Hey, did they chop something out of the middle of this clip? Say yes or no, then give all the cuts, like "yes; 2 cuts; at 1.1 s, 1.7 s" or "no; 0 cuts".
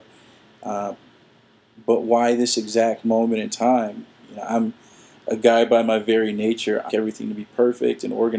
yes; 2 cuts; at 4.2 s, 6.9 s